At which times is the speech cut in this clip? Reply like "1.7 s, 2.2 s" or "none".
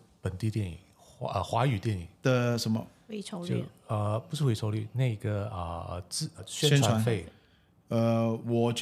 6.4 s